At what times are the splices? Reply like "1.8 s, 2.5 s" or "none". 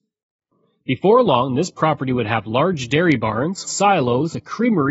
3.6 s